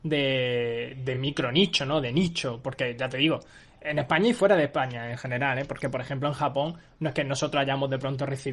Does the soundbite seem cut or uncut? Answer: uncut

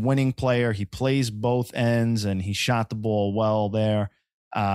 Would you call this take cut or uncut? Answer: uncut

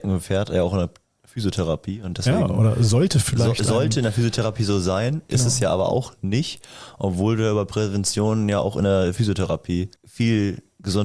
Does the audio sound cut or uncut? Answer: cut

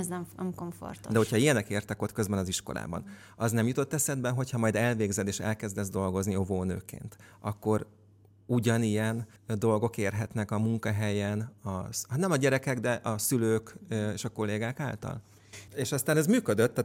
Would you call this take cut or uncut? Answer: cut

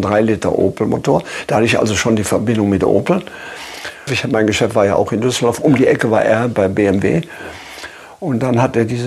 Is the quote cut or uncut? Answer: cut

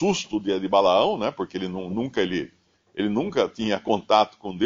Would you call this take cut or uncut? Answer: uncut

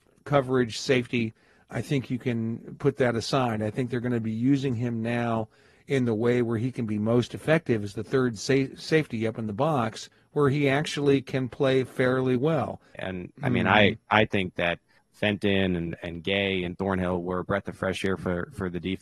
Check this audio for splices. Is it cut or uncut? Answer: cut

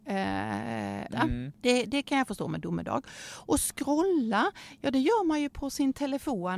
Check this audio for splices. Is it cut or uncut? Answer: cut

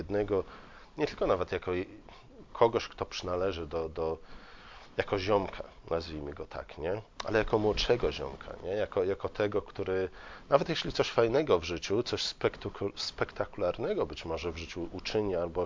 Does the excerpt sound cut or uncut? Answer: uncut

